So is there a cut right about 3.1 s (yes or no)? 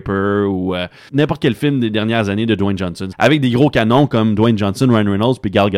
yes